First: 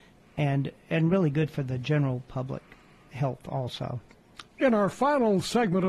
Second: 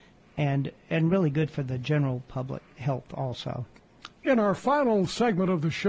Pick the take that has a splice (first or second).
second